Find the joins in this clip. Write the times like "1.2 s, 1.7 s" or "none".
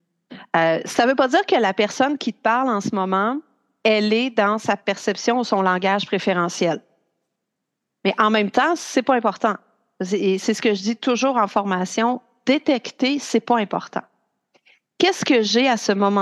none